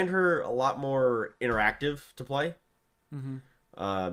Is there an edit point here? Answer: no; 0 cuts

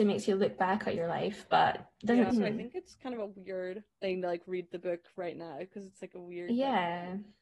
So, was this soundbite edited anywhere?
yes; 2 cuts; at 2.3 s, 3.9 s

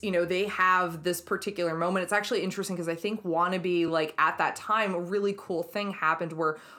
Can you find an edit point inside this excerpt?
no; 0 cuts

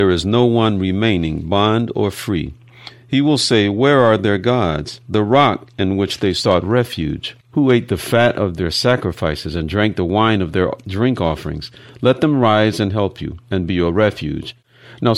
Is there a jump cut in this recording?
no; 0 cuts

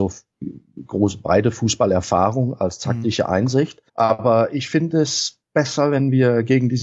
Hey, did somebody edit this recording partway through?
yes; 2 cuts; at 3.9 s, 5.4 s

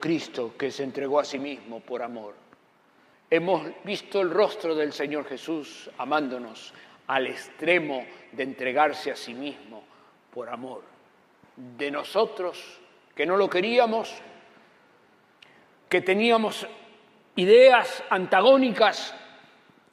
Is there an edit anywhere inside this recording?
yes; 1 cut; at 3.1 s

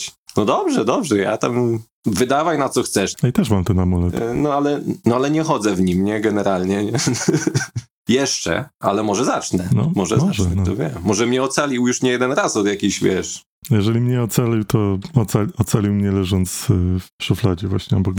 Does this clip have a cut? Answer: yes; 1 cut; at 3.1 s

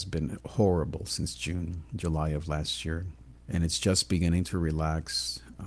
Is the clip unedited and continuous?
no; 1 cut; at 3.3 s

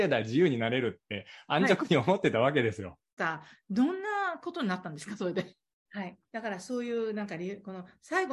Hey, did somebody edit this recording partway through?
yes; 2 cuts; at 3.2 s, 5.9 s

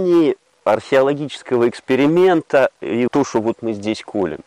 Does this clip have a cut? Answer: yes; 1 cut; at 3.1 s

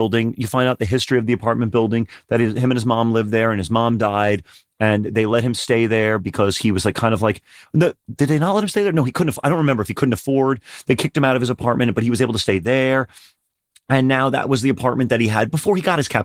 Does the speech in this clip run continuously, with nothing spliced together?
yes; 0 cuts

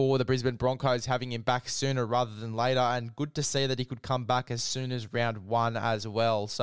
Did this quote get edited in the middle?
no; 0 cuts

